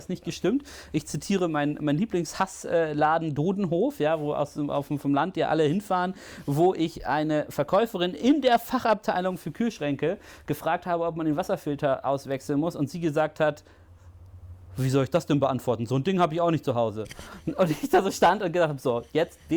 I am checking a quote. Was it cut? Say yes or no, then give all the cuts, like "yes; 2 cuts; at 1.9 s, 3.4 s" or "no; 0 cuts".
no; 0 cuts